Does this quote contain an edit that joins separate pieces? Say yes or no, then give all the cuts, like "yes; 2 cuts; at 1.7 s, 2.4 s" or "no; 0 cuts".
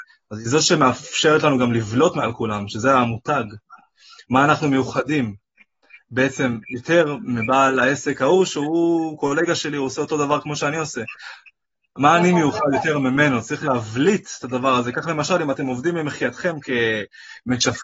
no; 0 cuts